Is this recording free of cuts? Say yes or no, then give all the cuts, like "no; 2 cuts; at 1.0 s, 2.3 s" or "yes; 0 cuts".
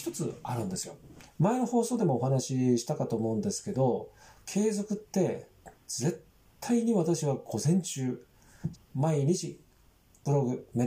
no; 2 cuts; at 1.3 s, 8.7 s